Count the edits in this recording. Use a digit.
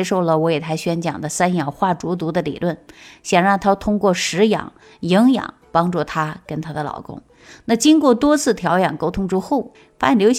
0